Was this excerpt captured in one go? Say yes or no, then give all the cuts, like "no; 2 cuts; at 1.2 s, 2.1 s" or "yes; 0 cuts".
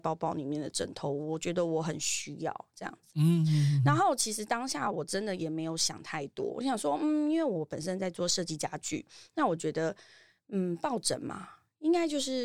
yes; 0 cuts